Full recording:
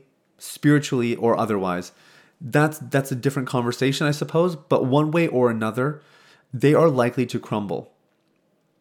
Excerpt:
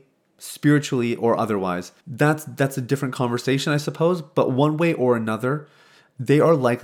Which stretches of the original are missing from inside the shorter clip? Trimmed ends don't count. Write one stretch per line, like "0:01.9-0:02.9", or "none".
0:02.0-0:02.3